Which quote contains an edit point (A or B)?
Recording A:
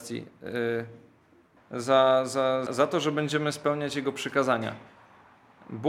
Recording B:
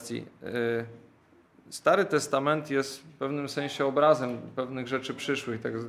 A